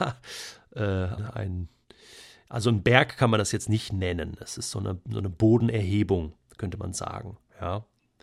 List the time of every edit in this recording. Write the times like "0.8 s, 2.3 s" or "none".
1.2 s